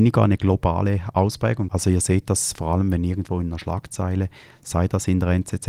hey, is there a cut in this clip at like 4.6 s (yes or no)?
no